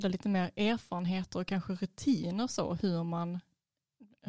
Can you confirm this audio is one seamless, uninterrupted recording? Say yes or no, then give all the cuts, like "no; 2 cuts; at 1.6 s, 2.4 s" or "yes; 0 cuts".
yes; 0 cuts